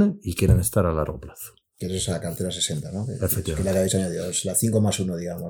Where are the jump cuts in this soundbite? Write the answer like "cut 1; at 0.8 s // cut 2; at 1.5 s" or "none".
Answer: none